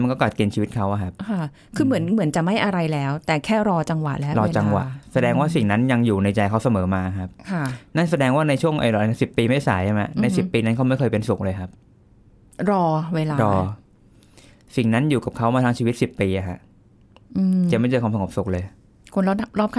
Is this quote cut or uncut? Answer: cut